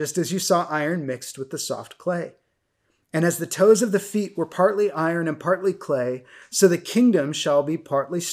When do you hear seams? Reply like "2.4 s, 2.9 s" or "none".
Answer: none